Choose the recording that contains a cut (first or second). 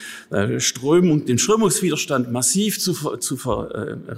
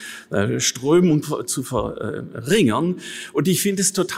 second